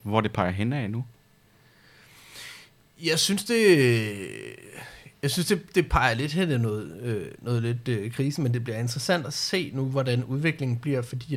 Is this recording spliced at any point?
no; 0 cuts

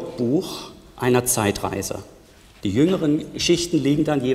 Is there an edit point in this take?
no; 0 cuts

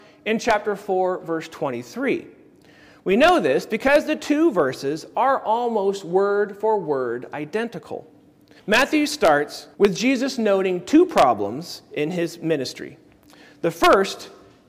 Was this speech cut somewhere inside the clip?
yes; 2 cuts; at 8.6 s, 9.7 s

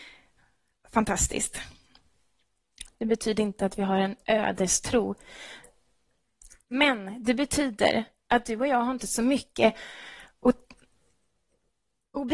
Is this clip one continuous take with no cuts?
no; 1 cut; at 2.9 s

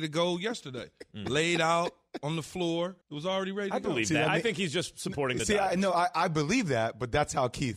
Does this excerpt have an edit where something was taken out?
yes; 1 cut; at 3.0 s

